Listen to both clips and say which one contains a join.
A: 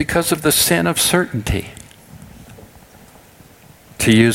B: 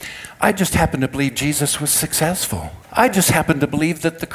B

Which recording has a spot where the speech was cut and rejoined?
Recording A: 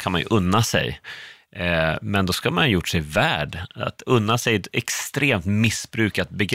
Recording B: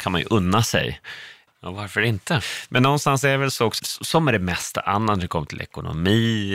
B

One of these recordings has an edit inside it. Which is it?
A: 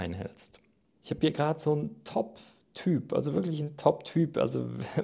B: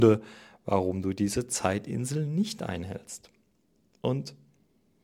A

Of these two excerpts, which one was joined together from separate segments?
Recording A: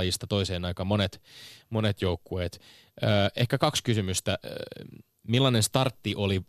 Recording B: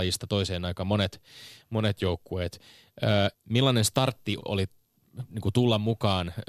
B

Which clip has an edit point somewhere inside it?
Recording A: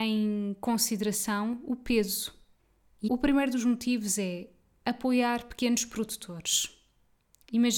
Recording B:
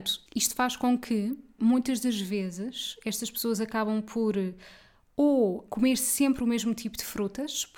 A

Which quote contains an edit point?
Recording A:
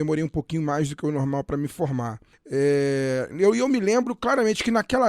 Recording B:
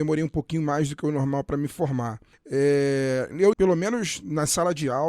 B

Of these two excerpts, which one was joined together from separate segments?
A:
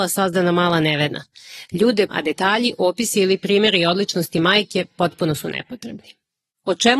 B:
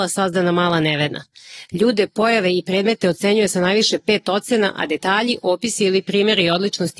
A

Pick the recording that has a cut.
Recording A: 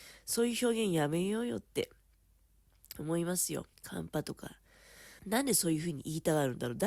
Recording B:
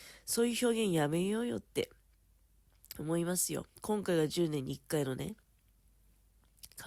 A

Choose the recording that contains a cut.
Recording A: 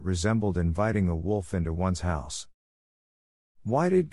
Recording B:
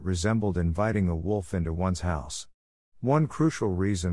B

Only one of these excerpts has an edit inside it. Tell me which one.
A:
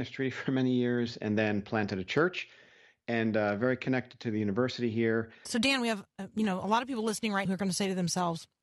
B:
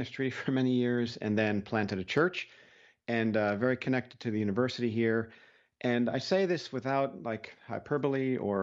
A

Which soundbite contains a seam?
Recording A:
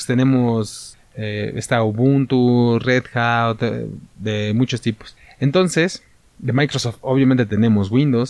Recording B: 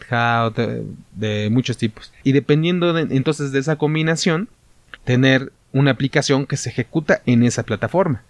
B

